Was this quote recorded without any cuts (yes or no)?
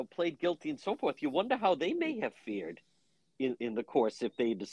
yes